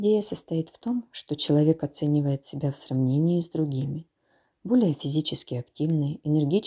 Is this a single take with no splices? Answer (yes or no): yes